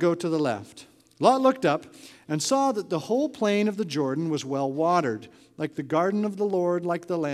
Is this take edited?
no; 0 cuts

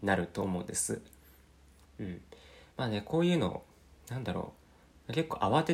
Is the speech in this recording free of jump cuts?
no; 1 cut; at 1.8 s

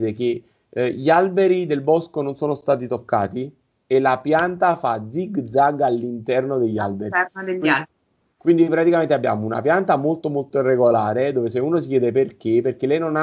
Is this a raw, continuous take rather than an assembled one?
yes; 0 cuts

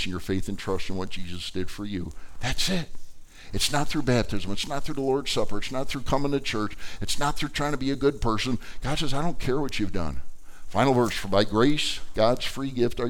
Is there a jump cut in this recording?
no; 0 cuts

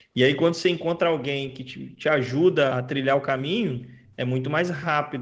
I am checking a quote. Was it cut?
yes; 1 cut; at 2.7 s

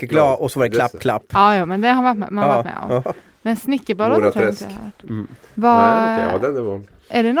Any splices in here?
no; 0 cuts

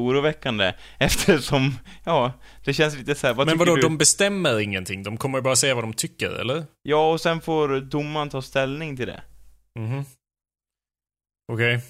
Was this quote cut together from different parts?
no; 0 cuts

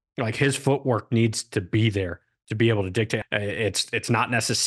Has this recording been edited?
yes; 1 cut; at 3.2 s

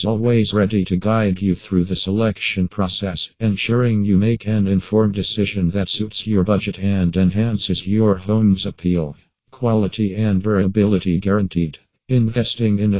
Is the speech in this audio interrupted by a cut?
no; 0 cuts

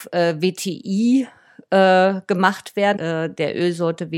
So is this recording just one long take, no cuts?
no; 1 cut; at 3.0 s

